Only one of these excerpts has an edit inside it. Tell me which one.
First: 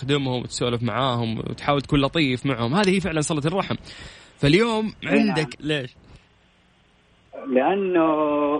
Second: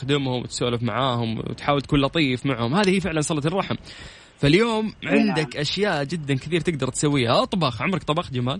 first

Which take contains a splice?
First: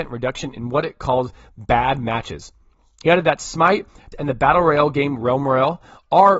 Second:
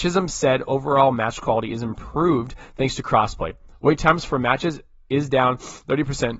first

